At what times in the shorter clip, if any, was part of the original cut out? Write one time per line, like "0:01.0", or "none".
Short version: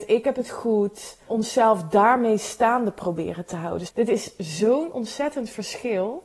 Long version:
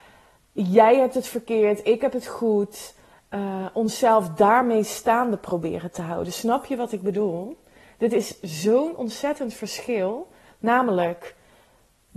0:01.3
0:03.9

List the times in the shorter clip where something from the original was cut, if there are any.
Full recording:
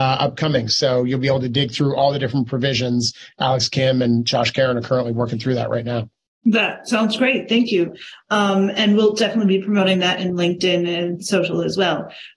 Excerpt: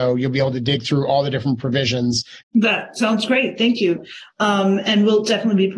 0:02.4

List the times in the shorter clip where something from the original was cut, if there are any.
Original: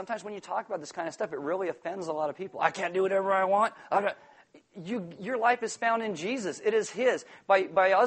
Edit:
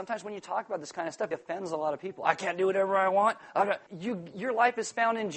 0:01.3
0:03.9

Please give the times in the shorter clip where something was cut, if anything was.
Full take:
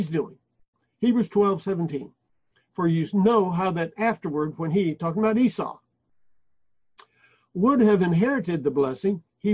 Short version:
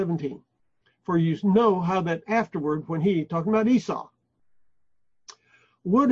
none

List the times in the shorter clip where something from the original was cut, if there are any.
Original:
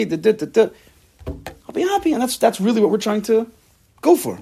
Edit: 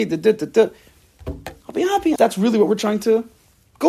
0:02.2

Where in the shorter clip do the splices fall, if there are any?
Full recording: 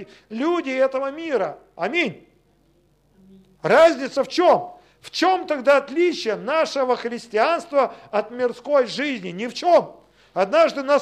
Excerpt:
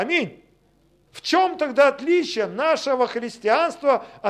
0:01.1

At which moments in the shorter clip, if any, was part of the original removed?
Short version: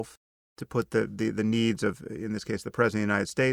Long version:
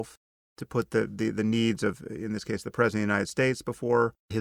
none

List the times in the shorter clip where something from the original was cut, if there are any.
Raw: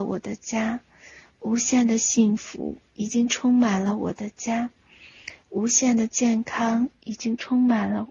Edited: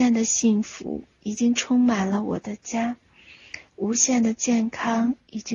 none

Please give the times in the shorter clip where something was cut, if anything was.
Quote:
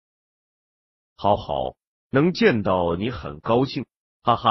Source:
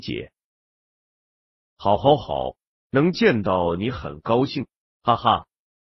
0:01.4

